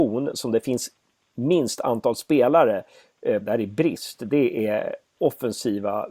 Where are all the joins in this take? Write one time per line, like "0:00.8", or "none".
0:03.4
0:05.2